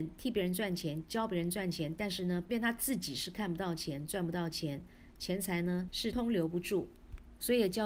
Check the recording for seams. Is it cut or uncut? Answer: cut